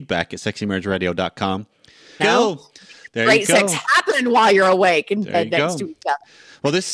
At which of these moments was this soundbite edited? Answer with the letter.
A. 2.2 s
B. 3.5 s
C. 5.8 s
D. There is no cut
A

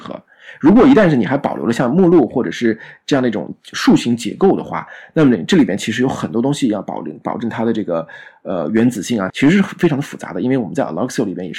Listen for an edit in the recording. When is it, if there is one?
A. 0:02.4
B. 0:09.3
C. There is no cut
B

